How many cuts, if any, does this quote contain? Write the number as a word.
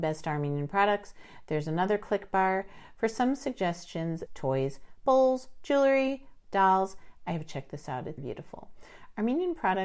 three